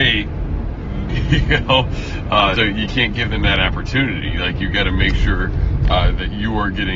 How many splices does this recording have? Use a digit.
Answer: 2